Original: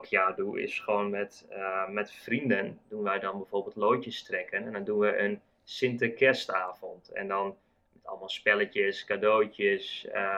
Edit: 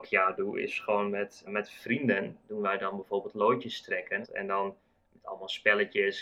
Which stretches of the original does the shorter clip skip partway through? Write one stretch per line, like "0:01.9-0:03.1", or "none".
0:01.5-0:01.9
0:04.6-0:07.0